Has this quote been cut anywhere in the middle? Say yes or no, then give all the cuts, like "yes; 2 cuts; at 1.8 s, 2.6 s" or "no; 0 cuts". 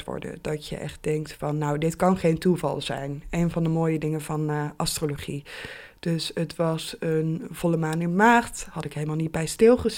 no; 0 cuts